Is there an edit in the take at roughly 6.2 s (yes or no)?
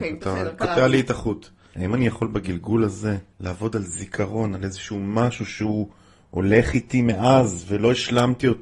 no